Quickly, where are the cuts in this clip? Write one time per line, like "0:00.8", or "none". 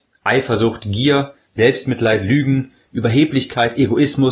0:01.5

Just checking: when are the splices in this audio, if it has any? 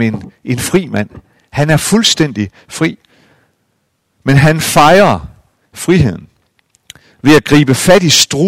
none

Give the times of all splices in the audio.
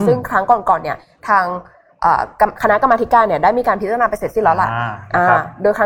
none

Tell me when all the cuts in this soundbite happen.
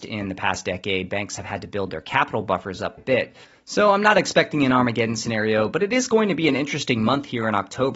0:03.0

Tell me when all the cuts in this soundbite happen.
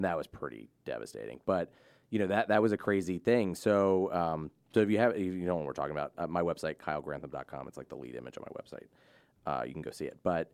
none

